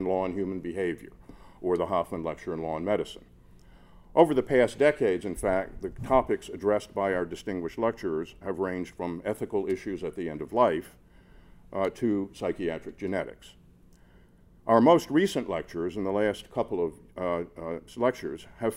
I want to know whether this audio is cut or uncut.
uncut